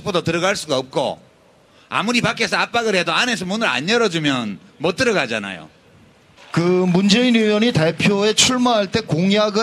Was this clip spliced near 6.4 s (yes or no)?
yes